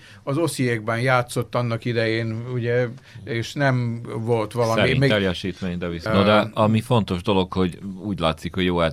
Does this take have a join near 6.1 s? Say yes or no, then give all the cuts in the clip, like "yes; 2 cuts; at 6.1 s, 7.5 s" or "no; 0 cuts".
yes; 1 cut; at 6.1 s